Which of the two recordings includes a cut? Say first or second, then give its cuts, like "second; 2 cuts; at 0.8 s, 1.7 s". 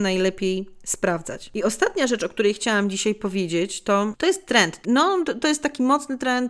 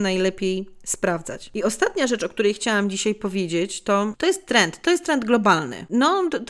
first; 1 cut; at 4.8 s